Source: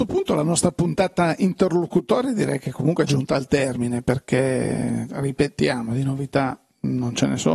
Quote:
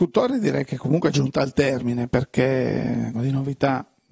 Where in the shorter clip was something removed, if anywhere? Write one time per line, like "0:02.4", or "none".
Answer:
0:03.1